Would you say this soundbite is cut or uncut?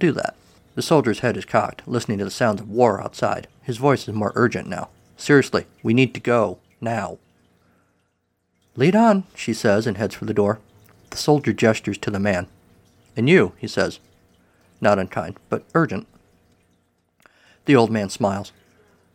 uncut